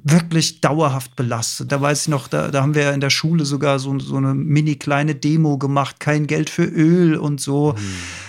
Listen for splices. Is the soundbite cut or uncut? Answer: cut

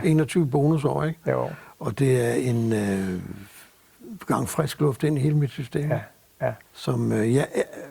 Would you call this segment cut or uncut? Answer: cut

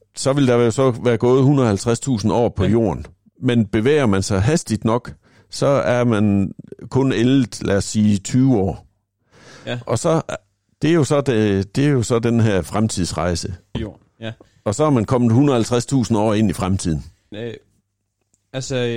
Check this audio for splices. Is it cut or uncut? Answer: cut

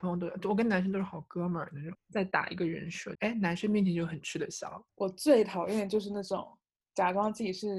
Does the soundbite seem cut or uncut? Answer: cut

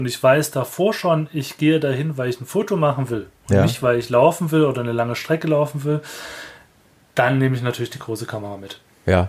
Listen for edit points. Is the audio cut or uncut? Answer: uncut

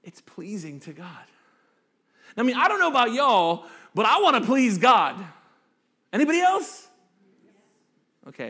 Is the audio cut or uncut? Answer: uncut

